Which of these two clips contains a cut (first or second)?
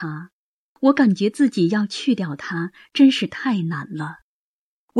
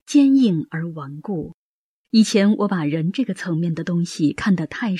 second